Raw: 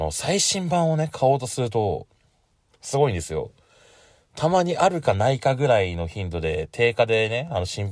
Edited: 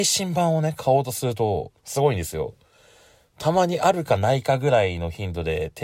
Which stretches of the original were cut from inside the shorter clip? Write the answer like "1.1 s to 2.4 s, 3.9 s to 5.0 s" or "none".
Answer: 2.1 s to 2.7 s